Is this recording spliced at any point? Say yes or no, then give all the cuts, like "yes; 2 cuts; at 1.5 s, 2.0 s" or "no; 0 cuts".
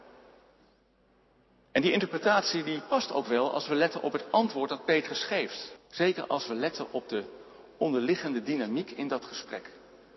yes; 1 cut; at 5.8 s